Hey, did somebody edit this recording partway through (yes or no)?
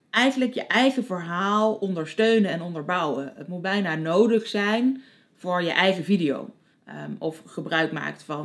yes